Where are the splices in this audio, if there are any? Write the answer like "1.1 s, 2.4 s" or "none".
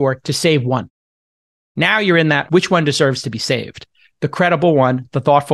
2.5 s